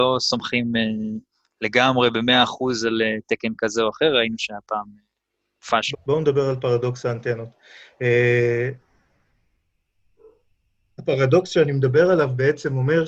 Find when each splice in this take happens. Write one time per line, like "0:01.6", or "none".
0:05.9

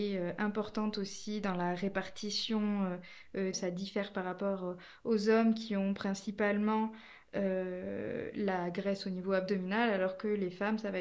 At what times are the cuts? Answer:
0:03.5

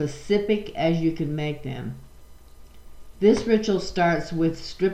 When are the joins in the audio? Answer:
0:03.1

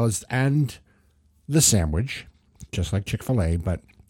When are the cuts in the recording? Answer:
none

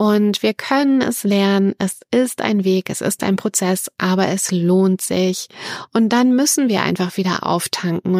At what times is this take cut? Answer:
0:05.9

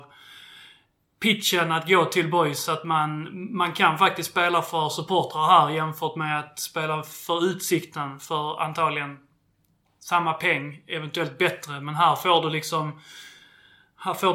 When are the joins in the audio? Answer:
none

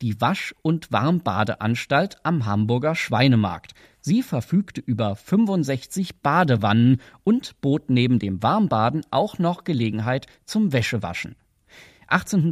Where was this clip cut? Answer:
none

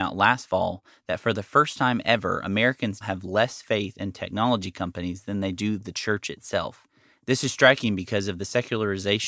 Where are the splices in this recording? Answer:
0:03.0

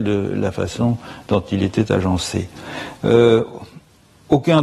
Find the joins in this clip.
0:03.0

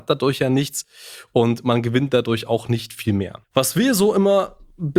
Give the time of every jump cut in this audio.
0:03.4

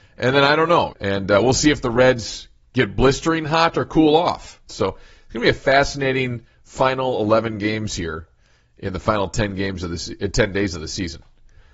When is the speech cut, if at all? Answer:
0:00.9
0:04.7

